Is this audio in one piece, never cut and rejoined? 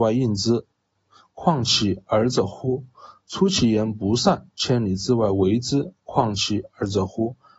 yes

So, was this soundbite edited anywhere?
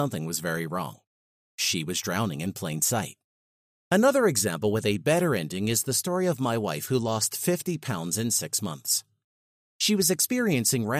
yes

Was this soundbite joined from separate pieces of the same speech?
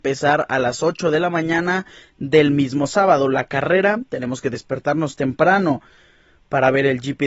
no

